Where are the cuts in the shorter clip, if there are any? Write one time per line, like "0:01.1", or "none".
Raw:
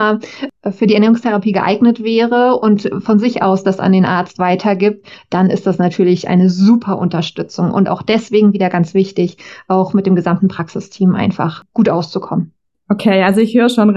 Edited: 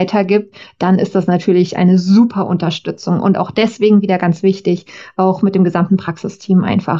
none

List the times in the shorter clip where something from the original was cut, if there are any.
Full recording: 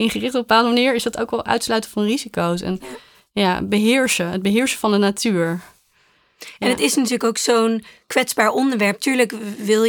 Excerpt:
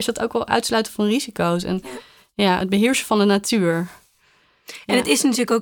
0:02.6

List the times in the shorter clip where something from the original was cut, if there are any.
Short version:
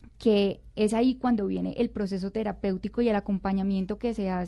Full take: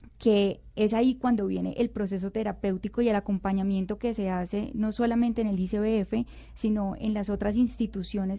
none

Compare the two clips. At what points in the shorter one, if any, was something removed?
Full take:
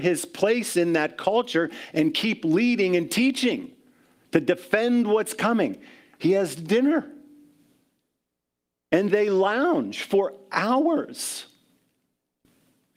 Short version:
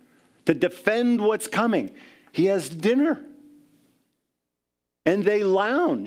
none

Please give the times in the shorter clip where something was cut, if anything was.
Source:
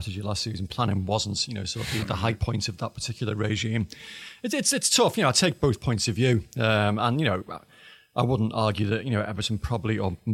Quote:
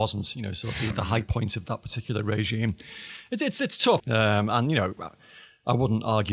0:04.0

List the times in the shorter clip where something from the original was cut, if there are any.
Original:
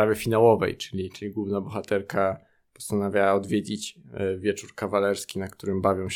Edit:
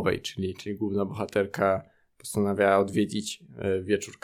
none

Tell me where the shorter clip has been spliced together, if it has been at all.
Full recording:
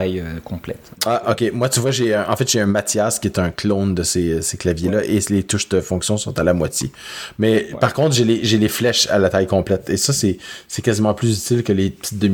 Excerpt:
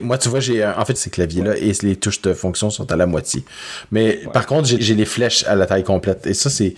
0:01.0
0:04.8

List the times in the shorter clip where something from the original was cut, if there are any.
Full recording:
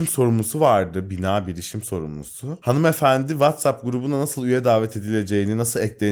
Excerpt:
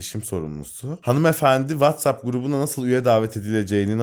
none

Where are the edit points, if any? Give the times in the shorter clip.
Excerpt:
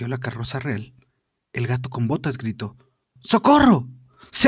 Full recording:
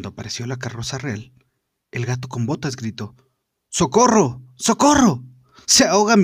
0:03.2

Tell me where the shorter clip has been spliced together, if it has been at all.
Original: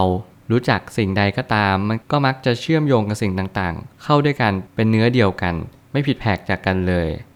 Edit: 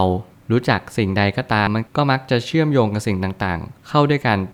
0:01.7

